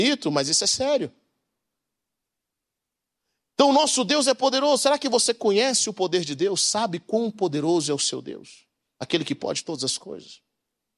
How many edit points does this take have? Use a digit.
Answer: 0